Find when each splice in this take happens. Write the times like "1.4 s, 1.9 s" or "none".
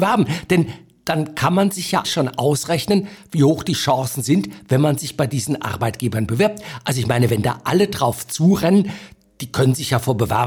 2.0 s